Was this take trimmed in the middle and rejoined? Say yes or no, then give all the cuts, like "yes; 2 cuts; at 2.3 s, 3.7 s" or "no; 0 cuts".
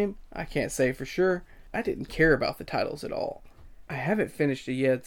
yes; 2 cuts; at 1.7 s, 3.9 s